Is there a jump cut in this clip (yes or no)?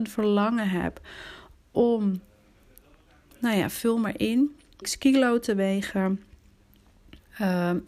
yes